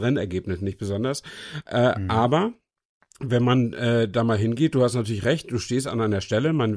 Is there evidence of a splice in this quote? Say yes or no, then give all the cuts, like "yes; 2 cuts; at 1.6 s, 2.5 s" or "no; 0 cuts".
yes; 1 cut; at 1.6 s